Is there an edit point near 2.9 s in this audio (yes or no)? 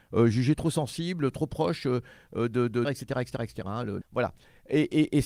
yes